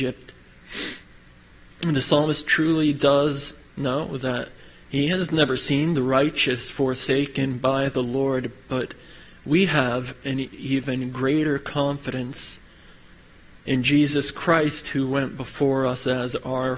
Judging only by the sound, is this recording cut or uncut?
uncut